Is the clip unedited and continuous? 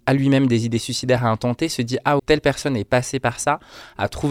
no; 1 cut; at 2.2 s

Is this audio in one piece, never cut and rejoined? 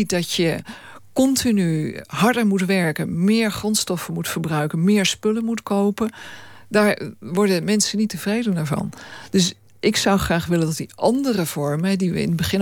yes; 0 cuts

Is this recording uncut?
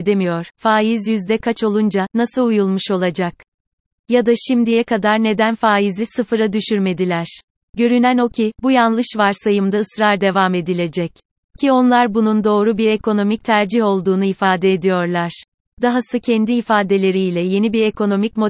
yes; 0 cuts

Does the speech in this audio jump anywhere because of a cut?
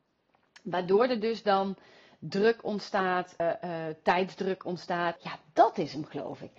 yes; 2 cuts; at 3.4 s, 5.2 s

